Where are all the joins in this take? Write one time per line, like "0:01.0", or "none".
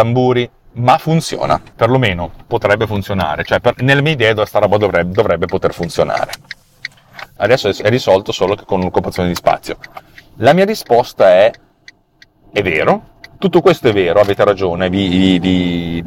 0:01.8
0:07.4